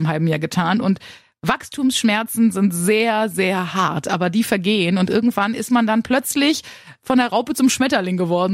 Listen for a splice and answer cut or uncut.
uncut